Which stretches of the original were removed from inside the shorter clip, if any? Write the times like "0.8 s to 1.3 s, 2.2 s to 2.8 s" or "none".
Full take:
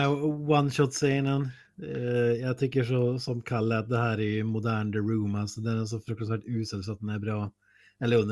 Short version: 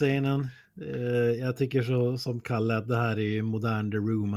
none